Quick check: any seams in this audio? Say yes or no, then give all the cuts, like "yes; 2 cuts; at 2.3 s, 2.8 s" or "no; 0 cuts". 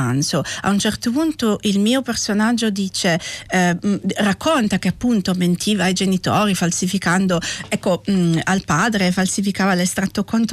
no; 0 cuts